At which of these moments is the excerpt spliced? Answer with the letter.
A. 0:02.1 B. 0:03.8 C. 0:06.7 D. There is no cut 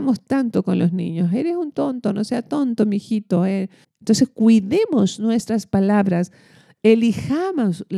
B